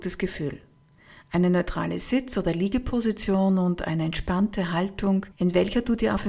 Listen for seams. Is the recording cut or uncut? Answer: cut